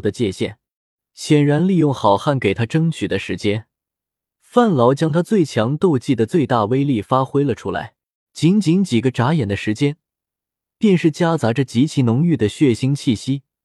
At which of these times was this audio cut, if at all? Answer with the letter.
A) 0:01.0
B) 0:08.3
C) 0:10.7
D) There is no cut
B